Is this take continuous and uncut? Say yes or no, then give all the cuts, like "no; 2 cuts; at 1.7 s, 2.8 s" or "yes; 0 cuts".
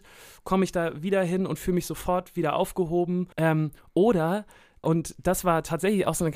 no; 2 cuts; at 3.3 s, 4.8 s